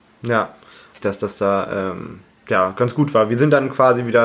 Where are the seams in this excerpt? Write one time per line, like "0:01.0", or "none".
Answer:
0:01.0

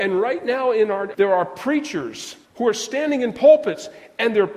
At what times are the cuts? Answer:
0:01.1
0:02.4

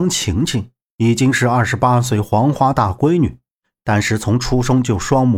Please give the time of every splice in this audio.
none

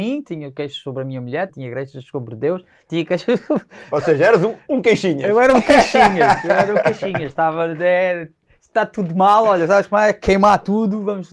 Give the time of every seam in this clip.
0:01.5

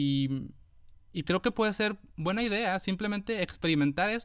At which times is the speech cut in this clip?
none

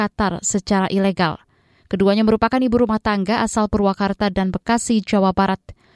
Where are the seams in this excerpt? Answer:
none

